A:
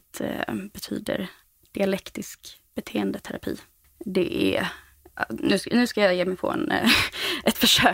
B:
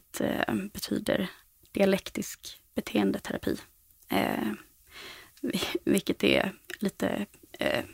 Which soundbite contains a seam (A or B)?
A